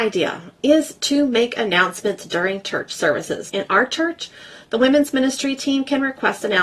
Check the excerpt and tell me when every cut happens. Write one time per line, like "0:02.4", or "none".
0:03.5